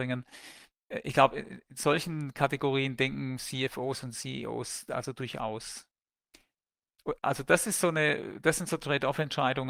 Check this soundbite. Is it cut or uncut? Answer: cut